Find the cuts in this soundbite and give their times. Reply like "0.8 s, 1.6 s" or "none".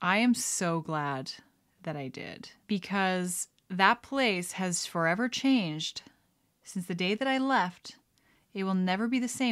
none